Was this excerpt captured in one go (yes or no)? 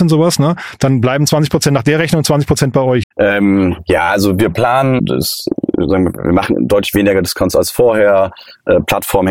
no